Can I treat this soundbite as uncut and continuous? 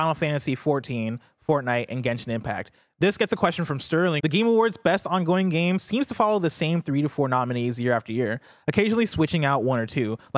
no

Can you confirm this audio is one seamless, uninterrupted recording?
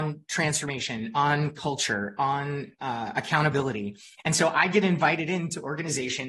yes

